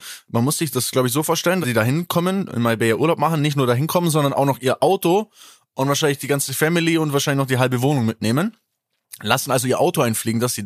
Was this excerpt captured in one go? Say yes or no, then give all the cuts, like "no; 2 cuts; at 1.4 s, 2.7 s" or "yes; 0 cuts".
no; 1 cut; at 1.6 s